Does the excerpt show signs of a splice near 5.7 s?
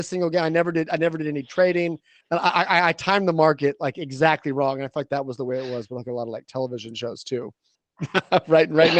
no; 2 cuts; at 2.2 s, 7.7 s

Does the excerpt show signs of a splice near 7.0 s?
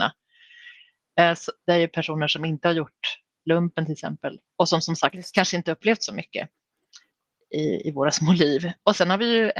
no; 2 cuts; at 1.5 s, 4.5 s

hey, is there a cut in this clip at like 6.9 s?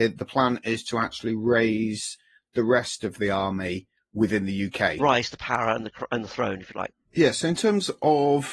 yes; 2 cuts; at 5.0 s, 6.9 s

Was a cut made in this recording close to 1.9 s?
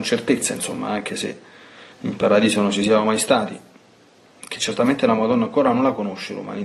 yes; 1 cut; at 1.9 s

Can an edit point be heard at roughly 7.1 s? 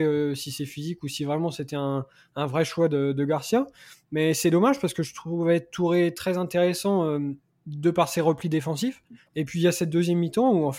no; 1 cut; at 9.3 s

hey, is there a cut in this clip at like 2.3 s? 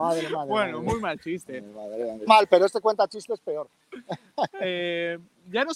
yes; 1 cut; at 2.3 s

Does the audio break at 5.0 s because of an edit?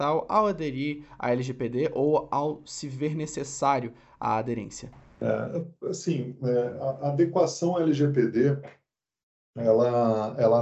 no; 0 cuts

